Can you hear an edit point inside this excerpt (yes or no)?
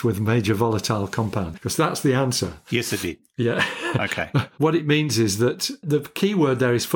yes